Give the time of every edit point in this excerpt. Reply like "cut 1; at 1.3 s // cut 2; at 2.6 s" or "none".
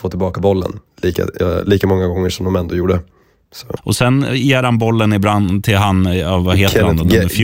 cut 1; at 1.4 s // cut 2; at 3.8 s